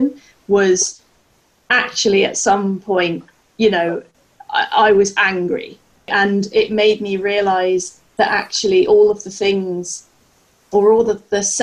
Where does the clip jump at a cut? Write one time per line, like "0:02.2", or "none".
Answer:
none